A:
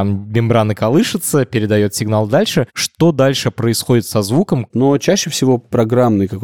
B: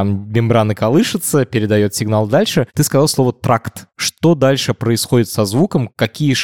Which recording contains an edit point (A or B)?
A